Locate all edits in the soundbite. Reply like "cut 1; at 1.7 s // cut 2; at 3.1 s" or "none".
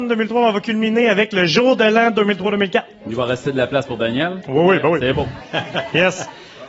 none